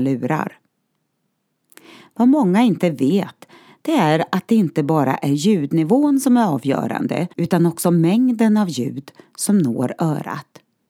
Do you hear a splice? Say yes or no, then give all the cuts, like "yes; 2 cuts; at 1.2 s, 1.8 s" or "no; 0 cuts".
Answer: yes; 1 cut; at 7.3 s